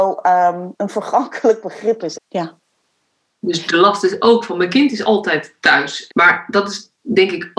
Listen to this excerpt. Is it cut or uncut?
cut